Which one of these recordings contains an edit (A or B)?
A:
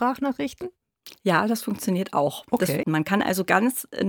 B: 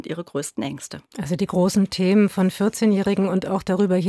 A